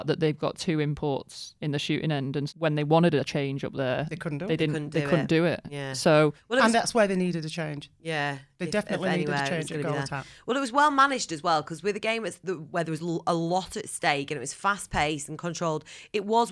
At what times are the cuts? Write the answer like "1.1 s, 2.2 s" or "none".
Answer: 2.5 s